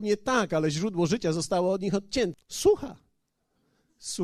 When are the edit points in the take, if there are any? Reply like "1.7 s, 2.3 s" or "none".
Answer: 2.3 s